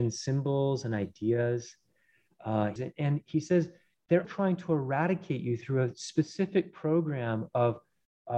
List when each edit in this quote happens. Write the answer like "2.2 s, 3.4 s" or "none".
2.8 s, 4.2 s